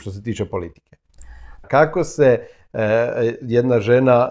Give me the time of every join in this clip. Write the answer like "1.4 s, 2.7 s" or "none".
1.6 s